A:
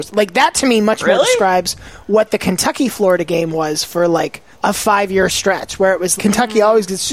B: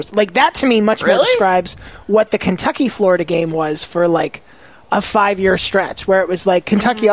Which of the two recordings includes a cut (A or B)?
A